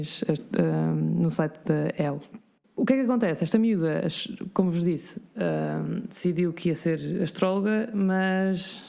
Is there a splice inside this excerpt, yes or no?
no